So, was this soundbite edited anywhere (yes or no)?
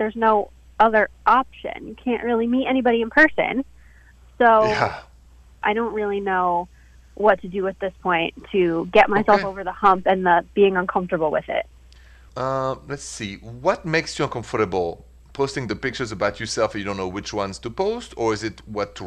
yes